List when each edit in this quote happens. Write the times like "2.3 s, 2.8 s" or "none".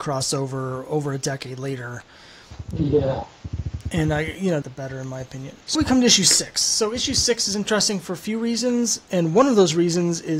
4.6 s, 5.8 s